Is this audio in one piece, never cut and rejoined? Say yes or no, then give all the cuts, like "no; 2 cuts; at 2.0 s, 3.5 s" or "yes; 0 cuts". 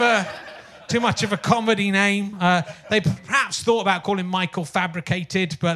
yes; 0 cuts